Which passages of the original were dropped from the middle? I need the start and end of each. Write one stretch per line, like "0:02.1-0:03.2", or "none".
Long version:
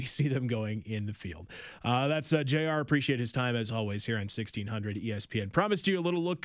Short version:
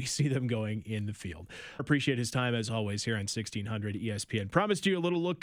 0:01.8-0:02.8